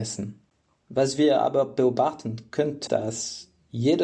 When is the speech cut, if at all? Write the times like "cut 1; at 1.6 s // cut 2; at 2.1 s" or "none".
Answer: cut 1; at 2.9 s

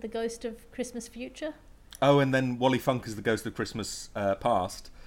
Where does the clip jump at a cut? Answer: none

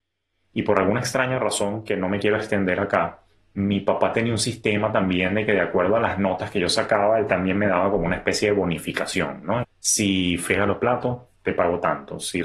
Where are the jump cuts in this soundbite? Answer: cut 1; at 9.6 s

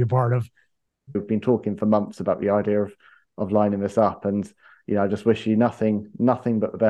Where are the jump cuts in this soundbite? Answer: cut 1; at 1.1 s

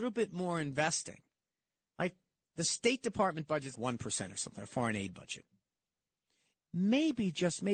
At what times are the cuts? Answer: cut 1; at 3.7 s // cut 2; at 6.5 s

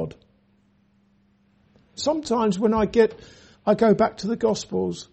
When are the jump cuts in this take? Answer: cut 1; at 2.0 s // cut 2; at 3.5 s

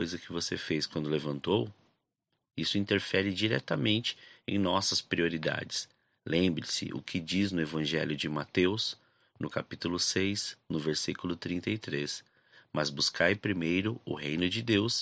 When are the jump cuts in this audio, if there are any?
none

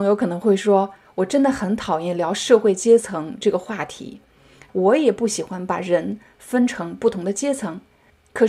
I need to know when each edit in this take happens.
cut 1; at 4.7 s

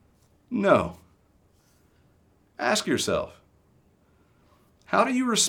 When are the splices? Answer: none

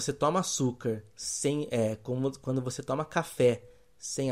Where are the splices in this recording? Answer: none

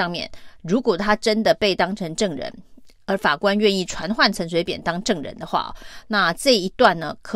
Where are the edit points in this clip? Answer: none

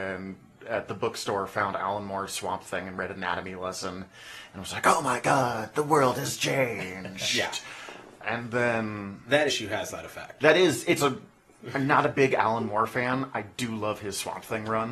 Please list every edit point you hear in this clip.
none

